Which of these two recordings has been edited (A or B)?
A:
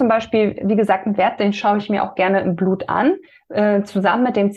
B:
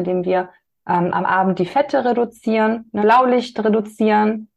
B